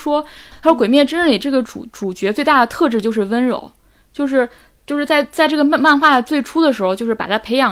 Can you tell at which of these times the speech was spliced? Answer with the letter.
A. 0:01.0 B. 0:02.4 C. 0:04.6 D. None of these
D